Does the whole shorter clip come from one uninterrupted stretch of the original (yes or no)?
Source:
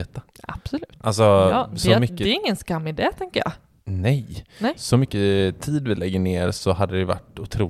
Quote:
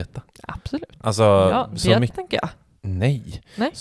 no